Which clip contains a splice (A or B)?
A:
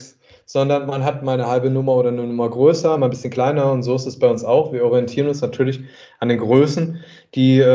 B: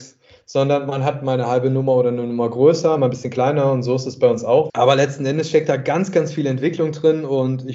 B